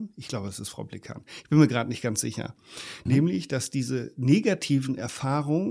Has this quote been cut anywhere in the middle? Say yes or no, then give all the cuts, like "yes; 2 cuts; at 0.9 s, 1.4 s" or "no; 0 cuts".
yes; 1 cut; at 3.1 s